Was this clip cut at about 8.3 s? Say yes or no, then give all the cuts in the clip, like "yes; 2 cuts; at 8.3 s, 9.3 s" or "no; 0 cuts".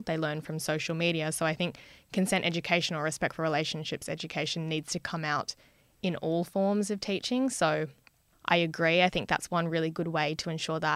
yes; 1 cut; at 8.3 s